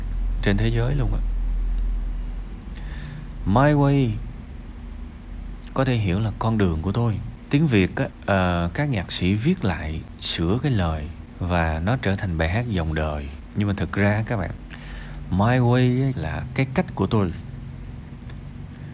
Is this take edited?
yes; 1 cut; at 16.1 s

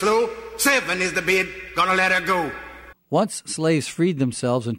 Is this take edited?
yes; 1 cut; at 2.9 s

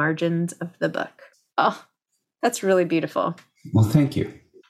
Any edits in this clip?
no; 0 cuts

